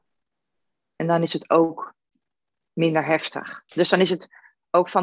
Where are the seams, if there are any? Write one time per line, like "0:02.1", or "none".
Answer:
0:03.7